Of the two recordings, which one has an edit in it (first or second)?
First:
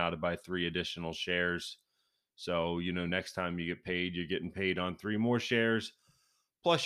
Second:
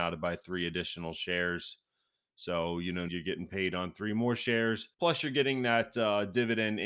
second